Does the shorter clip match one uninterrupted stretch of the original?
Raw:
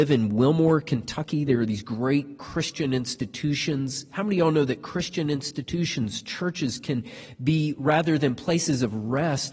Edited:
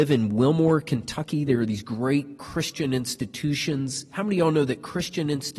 yes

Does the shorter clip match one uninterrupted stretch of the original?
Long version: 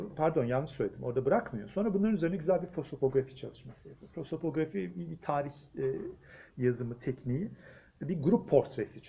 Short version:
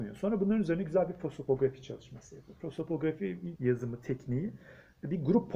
no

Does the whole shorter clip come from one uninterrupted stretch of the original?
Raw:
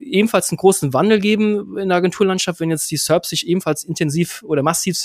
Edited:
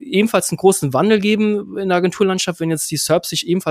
yes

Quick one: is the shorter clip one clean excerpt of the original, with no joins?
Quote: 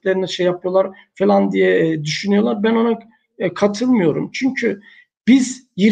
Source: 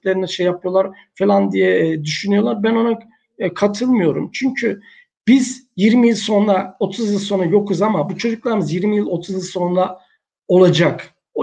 yes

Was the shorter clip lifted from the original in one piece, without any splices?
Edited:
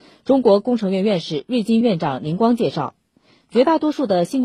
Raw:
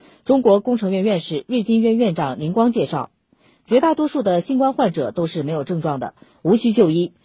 no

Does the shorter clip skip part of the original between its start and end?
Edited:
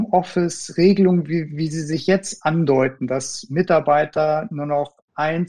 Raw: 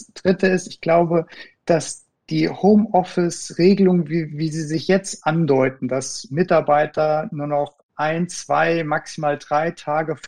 no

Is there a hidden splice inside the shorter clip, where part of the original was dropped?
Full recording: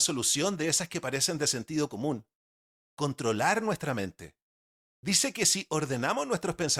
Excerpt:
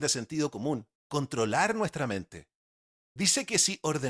yes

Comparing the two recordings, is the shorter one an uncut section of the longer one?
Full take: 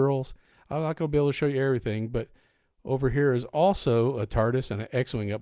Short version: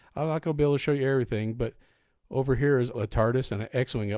no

